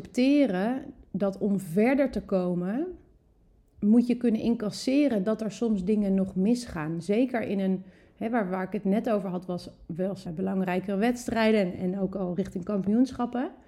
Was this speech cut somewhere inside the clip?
yes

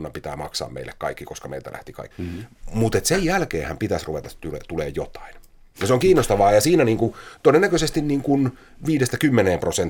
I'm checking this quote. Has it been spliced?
yes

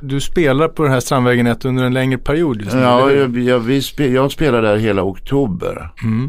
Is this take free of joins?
yes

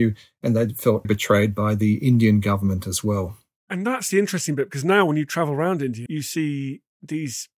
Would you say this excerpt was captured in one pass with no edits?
no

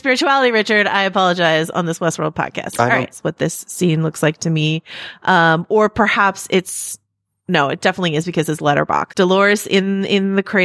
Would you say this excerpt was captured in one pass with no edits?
no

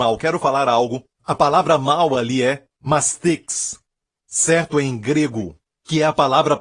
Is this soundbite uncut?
yes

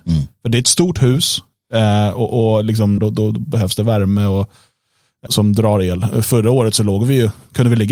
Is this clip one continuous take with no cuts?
no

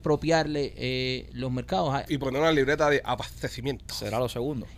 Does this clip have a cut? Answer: yes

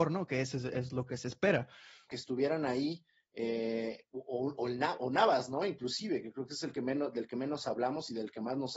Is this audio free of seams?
no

